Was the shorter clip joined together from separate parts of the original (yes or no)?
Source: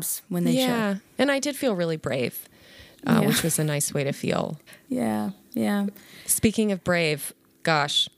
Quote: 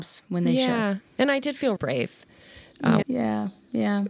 yes